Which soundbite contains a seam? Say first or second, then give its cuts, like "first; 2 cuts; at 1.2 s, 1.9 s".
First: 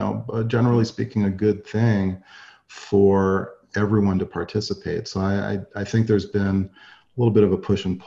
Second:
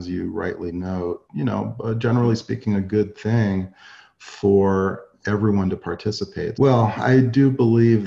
second; 2 cuts; at 1.3 s, 6.5 s